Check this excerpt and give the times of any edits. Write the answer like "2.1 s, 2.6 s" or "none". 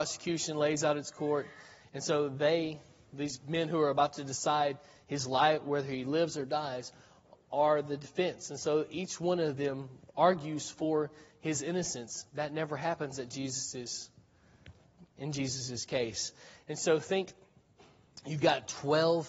1.8 s, 16.5 s